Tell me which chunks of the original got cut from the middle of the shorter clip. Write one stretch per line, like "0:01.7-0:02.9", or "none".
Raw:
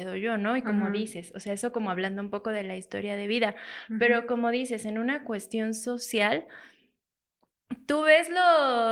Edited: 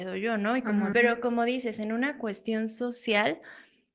0:00.9-0:04.0